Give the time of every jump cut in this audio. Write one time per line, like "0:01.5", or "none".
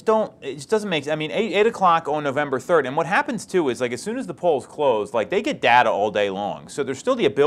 none